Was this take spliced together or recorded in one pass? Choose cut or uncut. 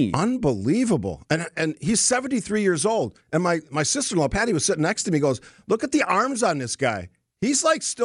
uncut